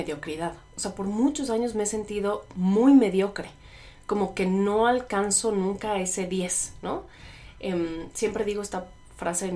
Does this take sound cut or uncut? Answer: uncut